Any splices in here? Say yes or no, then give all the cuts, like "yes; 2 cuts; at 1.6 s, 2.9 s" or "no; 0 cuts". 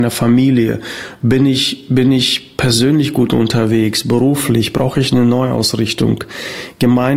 no; 0 cuts